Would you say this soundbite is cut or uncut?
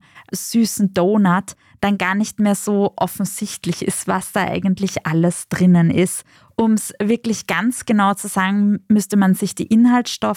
uncut